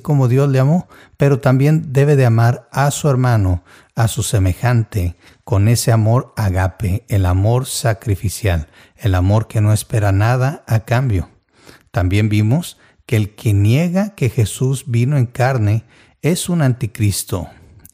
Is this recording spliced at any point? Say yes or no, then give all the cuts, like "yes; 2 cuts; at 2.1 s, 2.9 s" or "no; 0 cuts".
no; 0 cuts